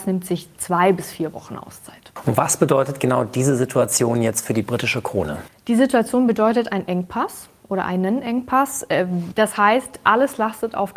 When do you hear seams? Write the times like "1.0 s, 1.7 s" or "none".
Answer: 9.3 s